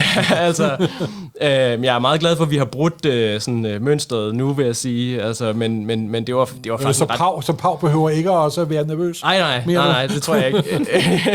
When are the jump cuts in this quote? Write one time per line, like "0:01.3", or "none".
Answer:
none